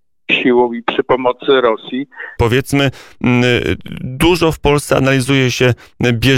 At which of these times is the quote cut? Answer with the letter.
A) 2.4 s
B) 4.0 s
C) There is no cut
A